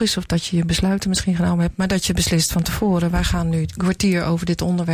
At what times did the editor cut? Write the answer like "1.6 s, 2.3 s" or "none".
none